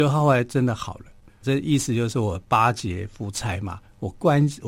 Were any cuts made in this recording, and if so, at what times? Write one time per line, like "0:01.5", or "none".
0:01.4